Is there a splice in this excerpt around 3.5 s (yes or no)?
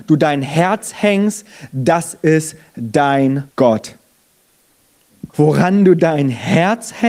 yes